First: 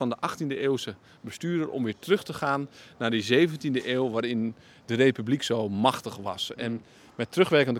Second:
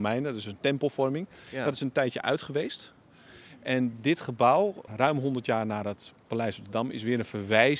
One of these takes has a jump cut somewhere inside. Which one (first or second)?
second